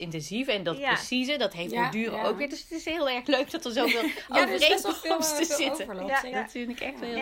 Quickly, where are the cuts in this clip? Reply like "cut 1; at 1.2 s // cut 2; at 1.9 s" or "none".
cut 1; at 6.3 s